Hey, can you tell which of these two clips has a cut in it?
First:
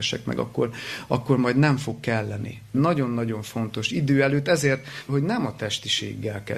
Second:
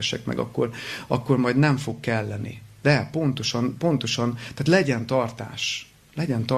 first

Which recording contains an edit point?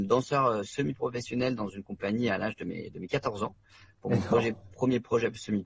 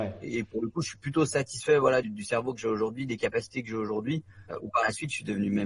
second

